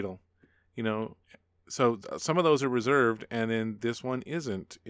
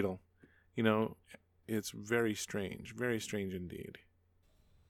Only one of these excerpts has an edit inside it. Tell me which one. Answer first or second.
second